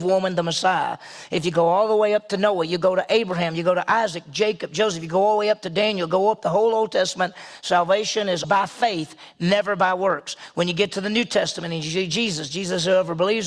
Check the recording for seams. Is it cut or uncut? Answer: cut